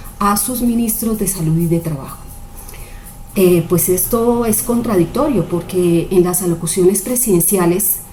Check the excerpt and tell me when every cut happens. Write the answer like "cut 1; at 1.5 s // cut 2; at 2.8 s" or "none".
cut 1; at 3.3 s